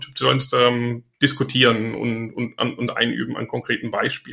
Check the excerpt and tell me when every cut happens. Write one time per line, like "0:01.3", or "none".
0:01.1